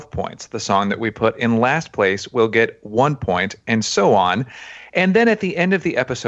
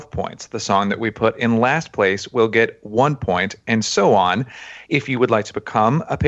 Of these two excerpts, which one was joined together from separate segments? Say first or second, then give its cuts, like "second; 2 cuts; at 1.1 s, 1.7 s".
second; 1 cut; at 4.8 s